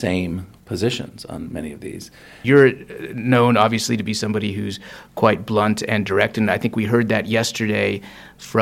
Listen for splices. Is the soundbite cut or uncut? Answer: cut